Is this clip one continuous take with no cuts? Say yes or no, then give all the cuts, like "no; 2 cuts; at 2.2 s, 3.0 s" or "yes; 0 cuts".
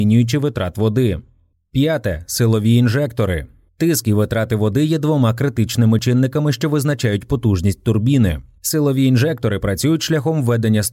yes; 0 cuts